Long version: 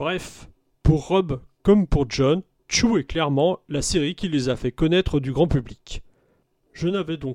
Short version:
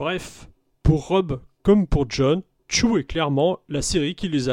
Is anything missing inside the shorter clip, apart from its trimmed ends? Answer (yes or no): no